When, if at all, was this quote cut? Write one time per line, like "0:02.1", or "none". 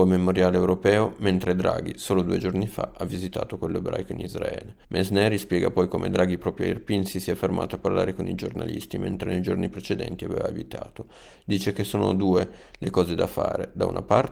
0:04.8